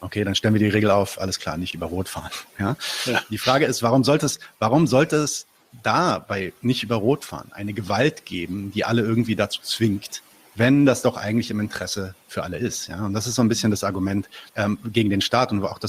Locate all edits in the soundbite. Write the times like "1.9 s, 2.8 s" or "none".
14.5 s